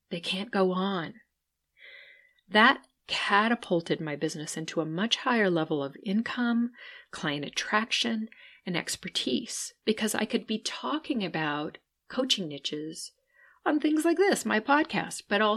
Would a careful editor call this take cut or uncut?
cut